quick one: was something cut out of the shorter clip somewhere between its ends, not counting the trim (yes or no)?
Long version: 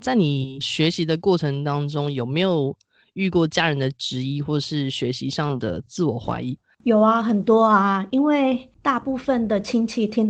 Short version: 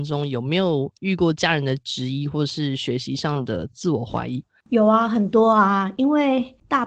yes